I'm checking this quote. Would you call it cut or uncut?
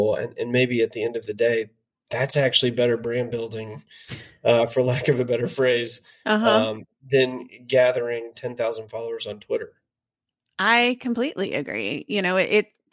uncut